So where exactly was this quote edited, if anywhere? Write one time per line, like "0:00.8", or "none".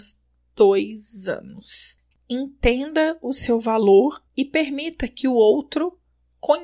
0:02.1
0:04.3

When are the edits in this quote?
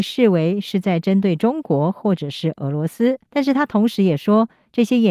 0:03.3

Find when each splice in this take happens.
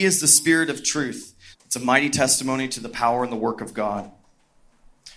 0:01.5

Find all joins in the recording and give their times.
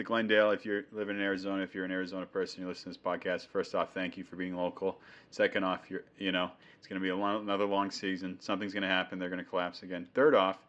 none

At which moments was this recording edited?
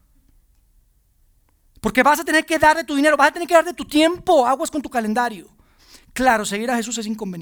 none

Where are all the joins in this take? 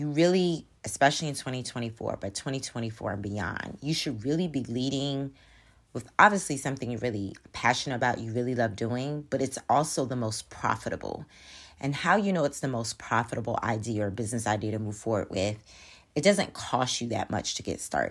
none

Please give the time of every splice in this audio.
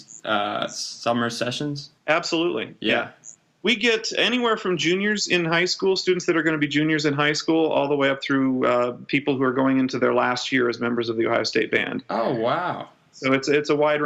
0:02.0

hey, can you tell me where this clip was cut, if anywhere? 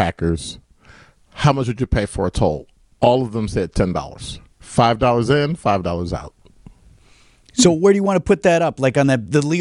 0:04.5

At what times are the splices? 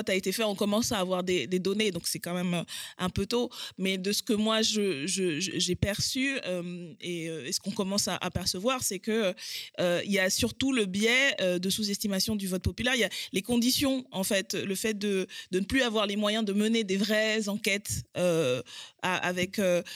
none

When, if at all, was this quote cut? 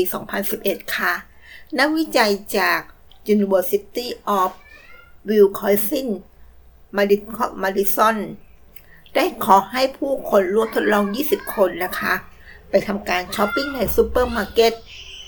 0:13.5

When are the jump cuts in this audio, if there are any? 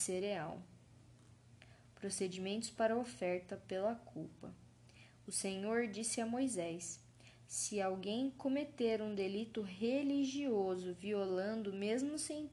none

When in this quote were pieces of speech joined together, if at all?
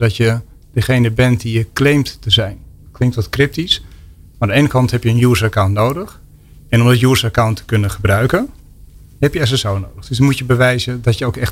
none

